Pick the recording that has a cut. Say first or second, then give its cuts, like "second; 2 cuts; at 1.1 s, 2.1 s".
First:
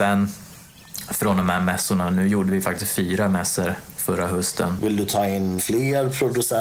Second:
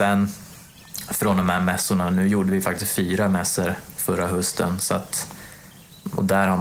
first; 1 cut; at 4.8 s